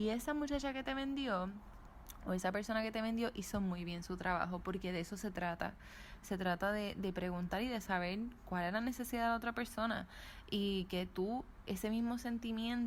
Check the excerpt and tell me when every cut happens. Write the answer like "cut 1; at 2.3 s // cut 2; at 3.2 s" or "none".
none